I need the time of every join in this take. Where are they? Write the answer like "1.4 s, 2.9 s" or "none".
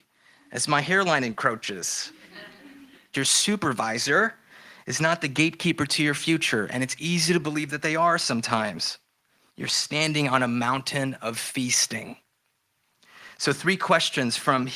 3.1 s, 9.5 s